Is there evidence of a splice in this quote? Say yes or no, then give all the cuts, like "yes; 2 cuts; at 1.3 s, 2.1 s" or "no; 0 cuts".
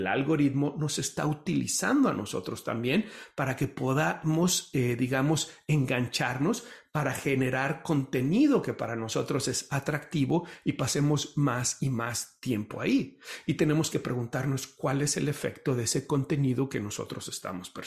no; 0 cuts